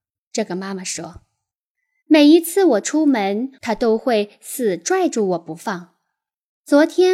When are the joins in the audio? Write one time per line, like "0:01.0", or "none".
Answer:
0:03.6